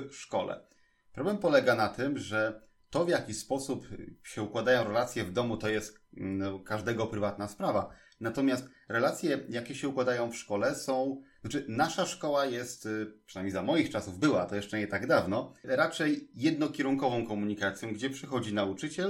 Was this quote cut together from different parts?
no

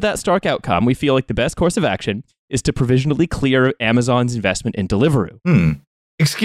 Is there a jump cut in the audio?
no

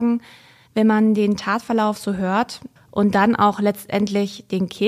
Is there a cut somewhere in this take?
yes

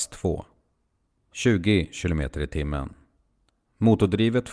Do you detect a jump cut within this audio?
no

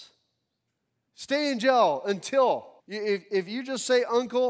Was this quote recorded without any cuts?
no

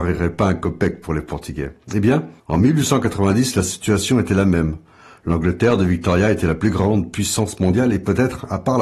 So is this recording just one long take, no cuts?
no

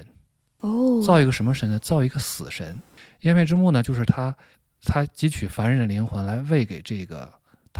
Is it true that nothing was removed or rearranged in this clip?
yes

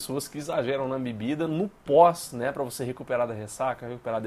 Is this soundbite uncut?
yes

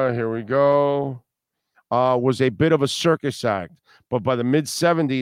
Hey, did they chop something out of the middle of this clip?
yes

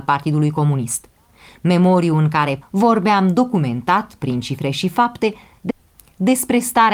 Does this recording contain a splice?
yes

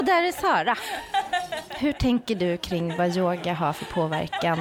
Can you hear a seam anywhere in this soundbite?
no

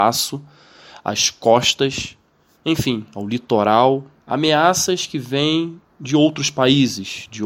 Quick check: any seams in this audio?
no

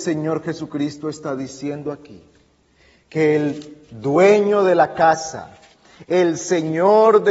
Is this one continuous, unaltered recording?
yes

